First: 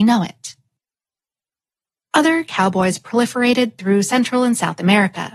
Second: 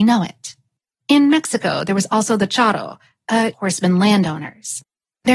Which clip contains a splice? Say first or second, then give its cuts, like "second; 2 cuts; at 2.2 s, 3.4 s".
second; 2 cuts; at 1.0 s, 3.5 s